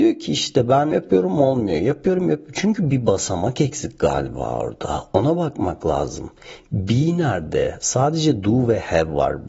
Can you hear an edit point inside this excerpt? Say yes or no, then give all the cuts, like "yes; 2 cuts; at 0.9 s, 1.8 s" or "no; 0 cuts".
yes; 1 cut; at 0.9 s